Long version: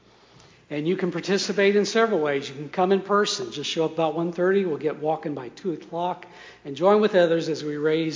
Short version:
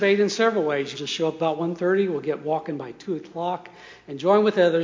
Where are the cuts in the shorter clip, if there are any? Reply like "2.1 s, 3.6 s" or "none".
0.9 s